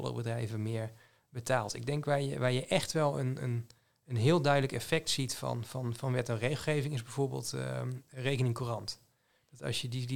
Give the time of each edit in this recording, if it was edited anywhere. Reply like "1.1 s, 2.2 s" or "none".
none